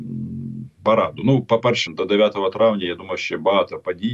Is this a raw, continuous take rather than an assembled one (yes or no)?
no